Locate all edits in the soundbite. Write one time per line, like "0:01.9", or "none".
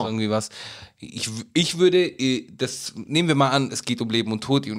none